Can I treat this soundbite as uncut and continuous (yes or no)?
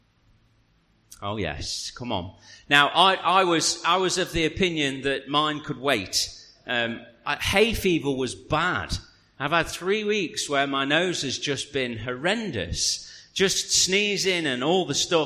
yes